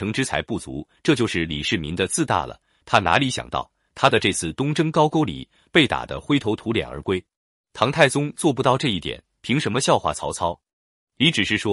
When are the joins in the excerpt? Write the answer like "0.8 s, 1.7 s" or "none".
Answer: 7.5 s